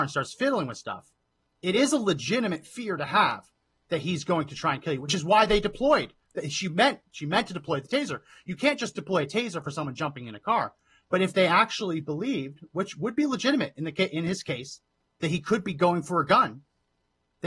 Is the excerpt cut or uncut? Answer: cut